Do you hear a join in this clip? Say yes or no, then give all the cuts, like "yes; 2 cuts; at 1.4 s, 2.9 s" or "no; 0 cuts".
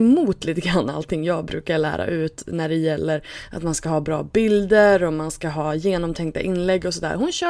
no; 0 cuts